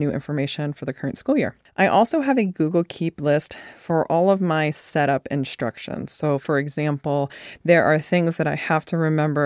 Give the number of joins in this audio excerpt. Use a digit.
0